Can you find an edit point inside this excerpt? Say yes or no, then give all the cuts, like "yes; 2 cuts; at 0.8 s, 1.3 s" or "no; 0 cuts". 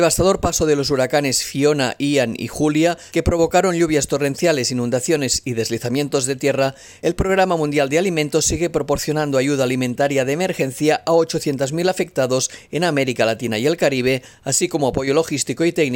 no; 0 cuts